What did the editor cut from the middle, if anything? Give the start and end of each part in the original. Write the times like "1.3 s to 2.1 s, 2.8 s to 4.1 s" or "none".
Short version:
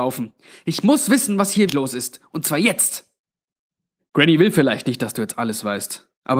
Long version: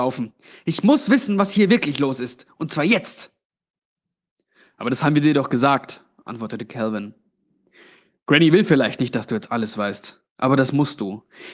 1.7 s to 1.9 s, 4.2 s to 8.1 s